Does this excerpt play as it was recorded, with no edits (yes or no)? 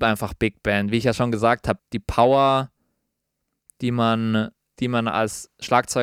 no